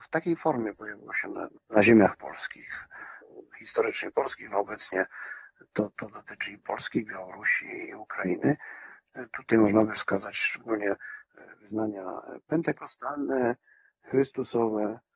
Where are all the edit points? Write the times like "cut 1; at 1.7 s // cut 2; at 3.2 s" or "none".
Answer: none